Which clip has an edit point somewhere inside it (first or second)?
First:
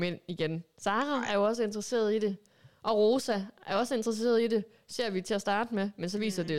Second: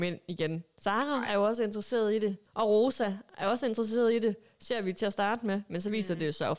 second